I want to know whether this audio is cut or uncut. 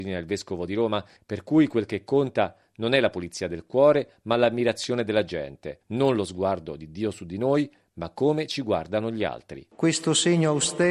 cut